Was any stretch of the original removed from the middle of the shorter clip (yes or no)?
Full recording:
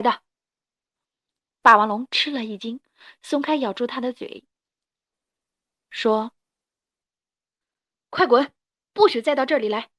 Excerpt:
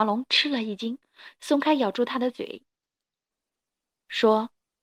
no